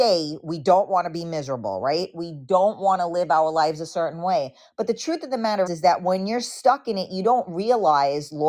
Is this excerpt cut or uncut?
cut